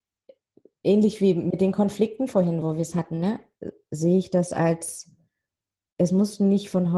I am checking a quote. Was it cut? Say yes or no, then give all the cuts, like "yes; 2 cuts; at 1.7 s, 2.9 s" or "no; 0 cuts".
no; 0 cuts